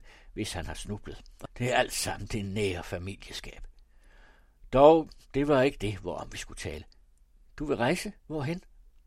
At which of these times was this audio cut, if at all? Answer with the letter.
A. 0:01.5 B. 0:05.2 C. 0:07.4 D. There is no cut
A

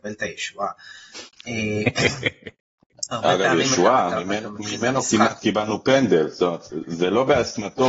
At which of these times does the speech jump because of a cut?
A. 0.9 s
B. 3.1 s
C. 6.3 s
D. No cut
D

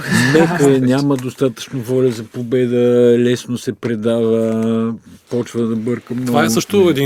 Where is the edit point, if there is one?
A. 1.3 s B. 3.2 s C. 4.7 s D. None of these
D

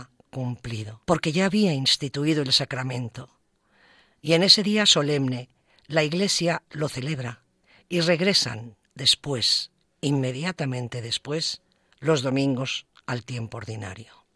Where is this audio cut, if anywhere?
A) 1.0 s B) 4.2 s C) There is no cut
A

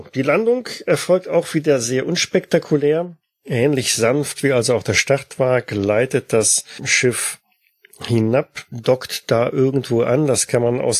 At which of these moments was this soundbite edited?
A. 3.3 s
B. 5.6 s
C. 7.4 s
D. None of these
D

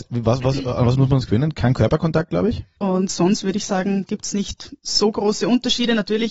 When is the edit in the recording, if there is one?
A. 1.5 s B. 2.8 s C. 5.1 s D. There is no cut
B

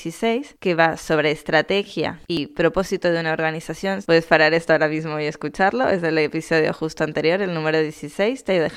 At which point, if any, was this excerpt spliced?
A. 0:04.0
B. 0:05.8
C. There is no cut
A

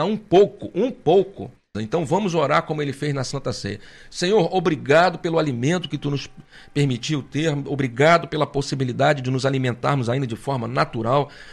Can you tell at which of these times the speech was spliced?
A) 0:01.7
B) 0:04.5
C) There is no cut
A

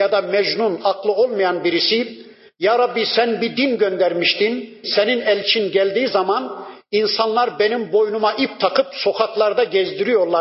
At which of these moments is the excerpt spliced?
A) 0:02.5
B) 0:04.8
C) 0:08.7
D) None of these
B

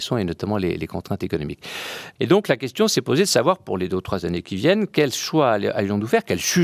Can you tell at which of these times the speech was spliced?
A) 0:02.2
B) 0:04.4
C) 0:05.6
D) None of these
A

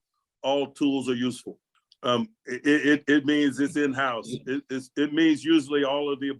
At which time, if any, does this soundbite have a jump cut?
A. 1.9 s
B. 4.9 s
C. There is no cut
A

